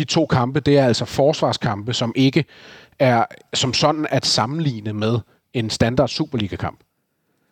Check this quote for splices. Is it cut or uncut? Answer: cut